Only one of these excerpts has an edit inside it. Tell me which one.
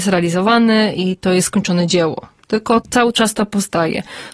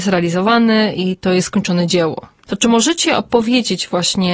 second; 1 cut; at 2.4 s

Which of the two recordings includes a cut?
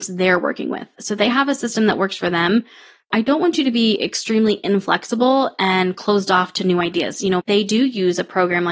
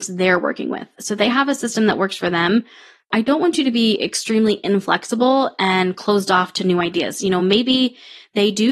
first; 1 cut; at 7.4 s

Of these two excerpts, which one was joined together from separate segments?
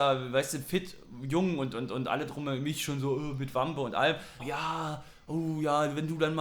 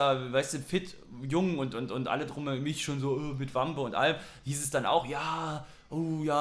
first; 1 cut; at 4.4 s

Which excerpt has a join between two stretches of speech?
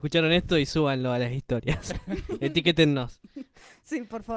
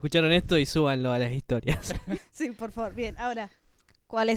second; 1 cut; at 2.2 s

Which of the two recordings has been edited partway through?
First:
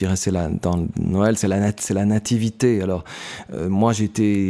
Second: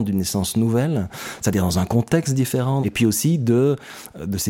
second; 1 cut; at 2.8 s

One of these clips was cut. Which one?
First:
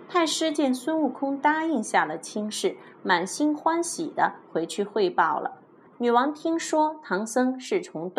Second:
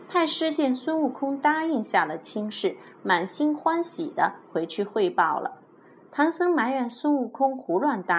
first; 1 cut; at 5.9 s

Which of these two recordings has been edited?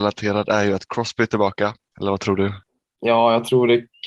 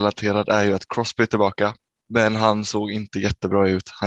first; 1 cut; at 1.9 s

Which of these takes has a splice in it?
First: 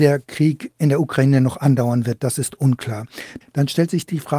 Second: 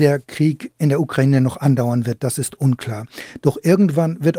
first; 1 cut; at 3.4 s

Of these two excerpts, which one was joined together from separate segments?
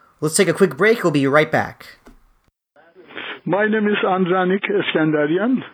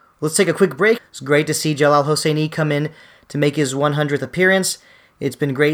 second; 1 cut; at 1.0 s

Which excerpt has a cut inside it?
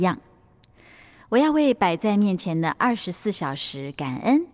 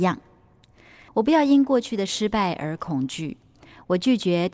second; 1 cut; at 1.1 s

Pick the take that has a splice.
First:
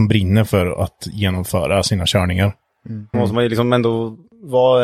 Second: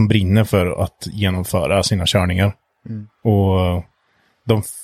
first; 1 cut; at 3.1 s

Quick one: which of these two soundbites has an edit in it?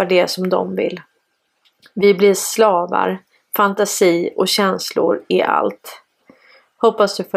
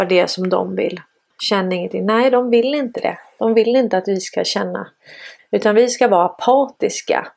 second; 2 cuts; at 1.3 s, 5.4 s

